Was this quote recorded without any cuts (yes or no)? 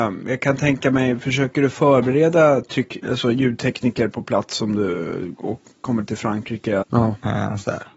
no